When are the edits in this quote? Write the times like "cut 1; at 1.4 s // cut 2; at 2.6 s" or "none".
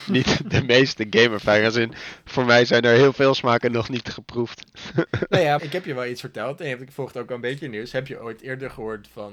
cut 1; at 5.6 s

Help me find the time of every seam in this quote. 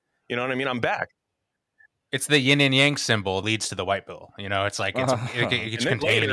cut 1; at 3.4 s

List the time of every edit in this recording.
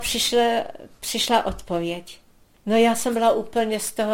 none

